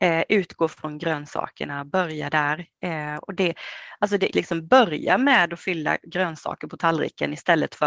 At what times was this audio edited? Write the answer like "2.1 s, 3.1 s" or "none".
4.3 s